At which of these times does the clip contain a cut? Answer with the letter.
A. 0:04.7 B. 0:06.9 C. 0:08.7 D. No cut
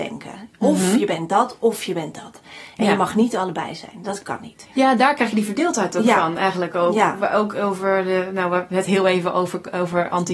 D